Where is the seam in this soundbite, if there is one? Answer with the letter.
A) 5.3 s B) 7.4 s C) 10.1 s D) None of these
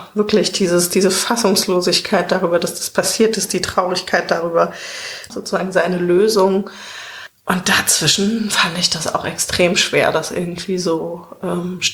A